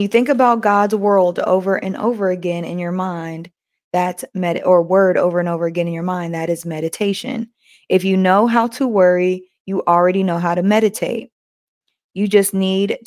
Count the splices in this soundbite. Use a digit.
0